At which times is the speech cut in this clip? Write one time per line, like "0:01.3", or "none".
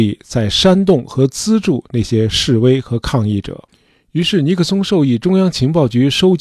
none